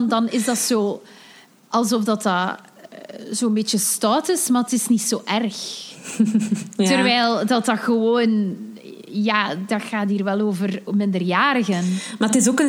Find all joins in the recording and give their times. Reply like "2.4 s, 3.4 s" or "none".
none